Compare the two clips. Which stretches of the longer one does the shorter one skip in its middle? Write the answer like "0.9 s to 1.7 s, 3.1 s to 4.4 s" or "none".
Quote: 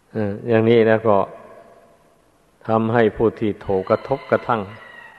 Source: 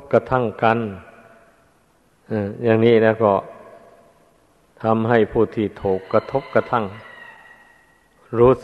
6.0 s to 6.1 s